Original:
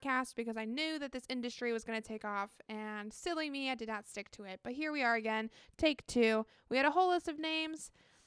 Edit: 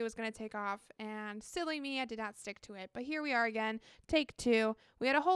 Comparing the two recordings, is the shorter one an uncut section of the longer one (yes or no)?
yes